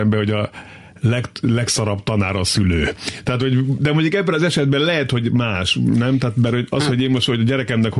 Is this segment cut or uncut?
uncut